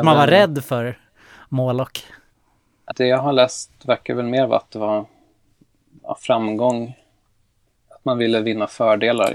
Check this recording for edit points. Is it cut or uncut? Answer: cut